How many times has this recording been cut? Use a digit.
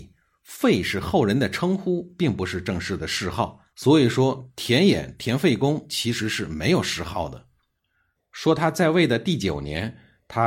2